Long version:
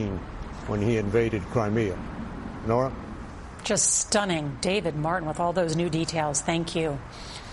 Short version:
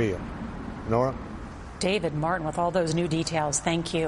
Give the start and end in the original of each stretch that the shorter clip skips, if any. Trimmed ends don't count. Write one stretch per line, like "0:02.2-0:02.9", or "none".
0:03.6-0:04.6